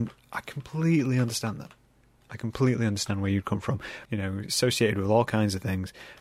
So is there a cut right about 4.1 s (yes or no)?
yes